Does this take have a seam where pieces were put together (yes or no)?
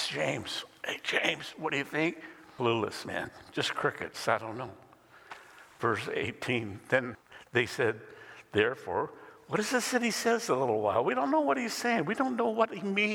no